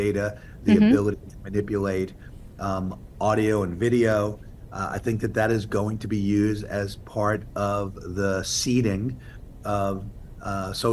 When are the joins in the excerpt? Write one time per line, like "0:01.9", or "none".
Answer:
none